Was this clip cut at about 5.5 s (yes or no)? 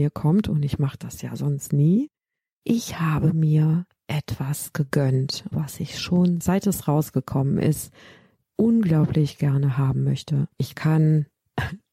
yes